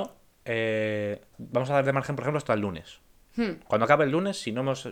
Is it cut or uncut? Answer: cut